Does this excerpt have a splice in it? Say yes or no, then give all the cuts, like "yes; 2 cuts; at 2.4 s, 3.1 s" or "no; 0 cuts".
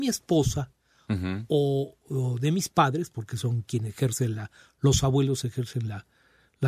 no; 0 cuts